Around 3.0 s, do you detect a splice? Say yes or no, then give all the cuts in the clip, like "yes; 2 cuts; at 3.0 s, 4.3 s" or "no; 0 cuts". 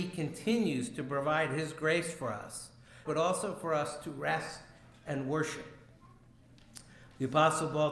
yes; 1 cut; at 3.0 s